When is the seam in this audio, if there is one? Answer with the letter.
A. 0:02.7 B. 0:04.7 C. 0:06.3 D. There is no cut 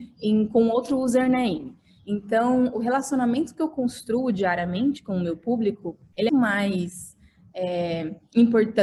C